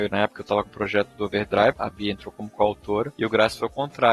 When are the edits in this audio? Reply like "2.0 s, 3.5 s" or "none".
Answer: 1.7 s